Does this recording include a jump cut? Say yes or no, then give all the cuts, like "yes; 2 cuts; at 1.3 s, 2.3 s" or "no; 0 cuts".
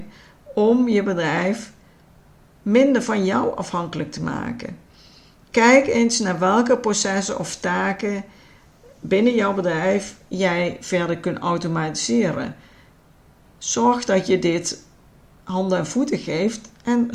no; 0 cuts